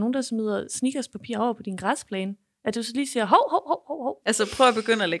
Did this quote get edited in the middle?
yes; 1 cut; at 4.2 s

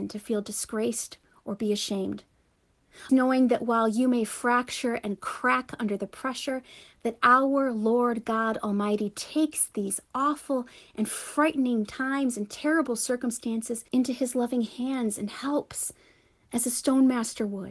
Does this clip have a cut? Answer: yes; 2 cuts; at 3.1 s, 13.9 s

